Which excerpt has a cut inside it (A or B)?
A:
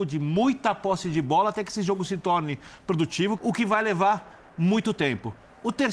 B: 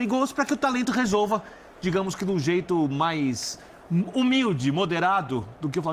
A